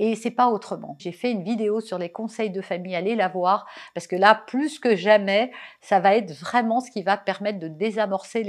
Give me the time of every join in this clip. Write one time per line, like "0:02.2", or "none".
0:01.0